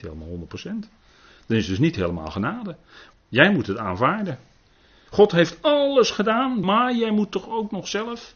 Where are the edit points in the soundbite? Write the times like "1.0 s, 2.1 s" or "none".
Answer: 3.1 s, 5.1 s, 6.6 s